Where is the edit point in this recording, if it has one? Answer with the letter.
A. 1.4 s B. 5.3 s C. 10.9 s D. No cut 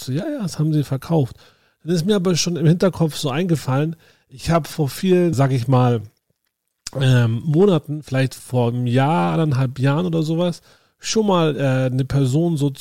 B